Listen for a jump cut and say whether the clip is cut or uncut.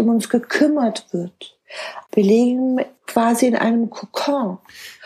uncut